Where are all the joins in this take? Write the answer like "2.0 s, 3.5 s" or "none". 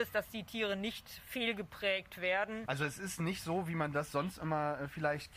2.6 s

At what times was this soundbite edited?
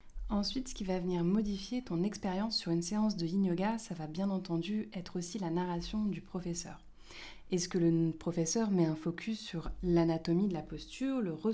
none

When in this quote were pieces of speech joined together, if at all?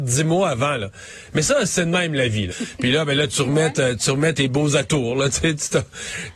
2.5 s, 4.3 s

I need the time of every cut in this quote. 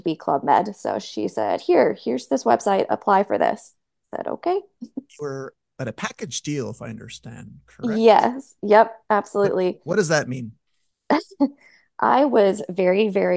none

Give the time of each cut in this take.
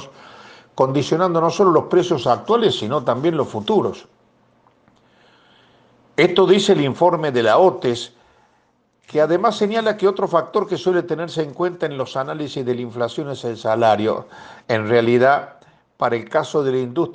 14.6 s

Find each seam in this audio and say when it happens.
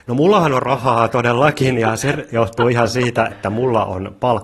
3.3 s

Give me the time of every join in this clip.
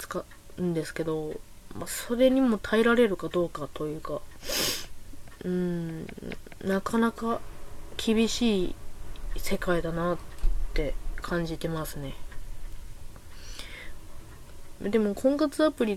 14.8 s

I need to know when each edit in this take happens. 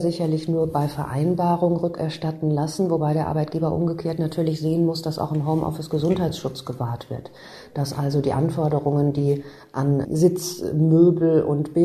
none

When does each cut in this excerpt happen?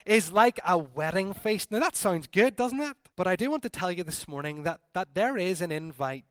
3.1 s

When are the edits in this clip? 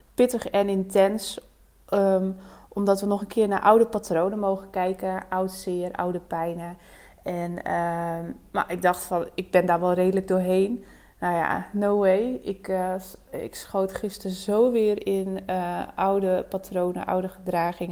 none

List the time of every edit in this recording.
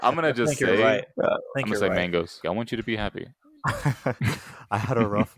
2.4 s

